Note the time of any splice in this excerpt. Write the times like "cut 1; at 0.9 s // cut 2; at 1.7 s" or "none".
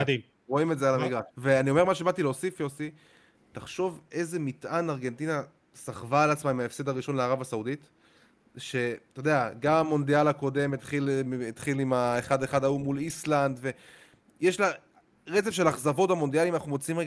cut 1; at 1.3 s